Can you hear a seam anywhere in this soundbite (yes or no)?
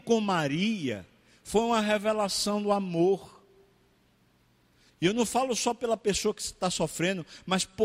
yes